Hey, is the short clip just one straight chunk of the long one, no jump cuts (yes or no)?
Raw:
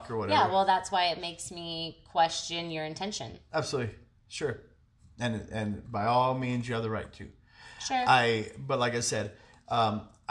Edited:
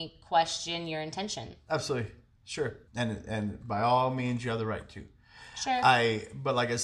no